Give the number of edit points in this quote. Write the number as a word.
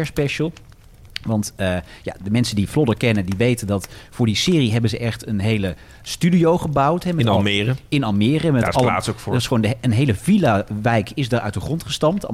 zero